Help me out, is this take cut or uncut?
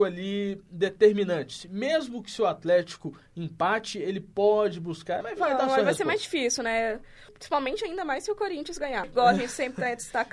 cut